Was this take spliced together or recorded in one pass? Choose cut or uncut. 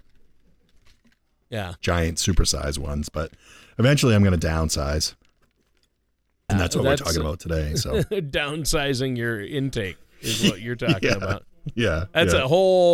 cut